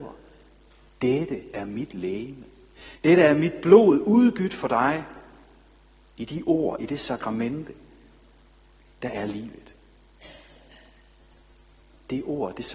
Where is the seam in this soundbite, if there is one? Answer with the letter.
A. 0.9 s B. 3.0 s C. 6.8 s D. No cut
D